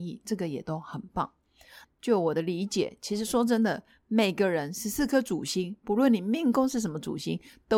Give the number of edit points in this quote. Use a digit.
1